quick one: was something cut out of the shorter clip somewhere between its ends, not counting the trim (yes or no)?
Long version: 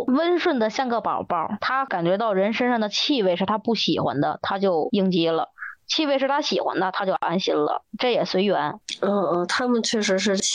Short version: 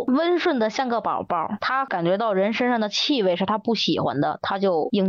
no